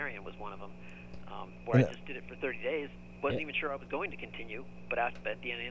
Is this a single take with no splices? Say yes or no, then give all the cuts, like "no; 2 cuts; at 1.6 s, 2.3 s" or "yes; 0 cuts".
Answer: yes; 0 cuts